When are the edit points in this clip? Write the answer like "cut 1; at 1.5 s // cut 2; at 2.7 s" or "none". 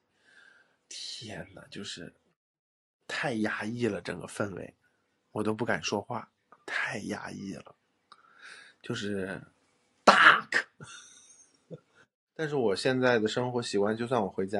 none